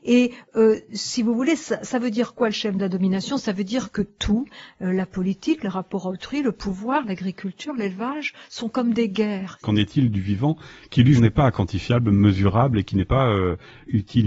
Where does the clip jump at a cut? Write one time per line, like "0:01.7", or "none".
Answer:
0:09.6
0:11.2